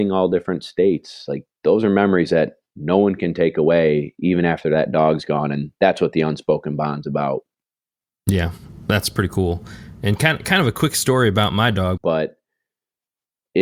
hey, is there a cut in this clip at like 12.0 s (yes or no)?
yes